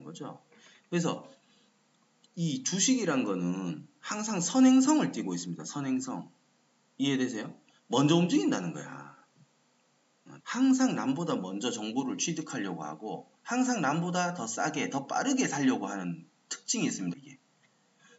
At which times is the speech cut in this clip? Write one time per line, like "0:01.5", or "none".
0:10.4
0:13.4
0:17.1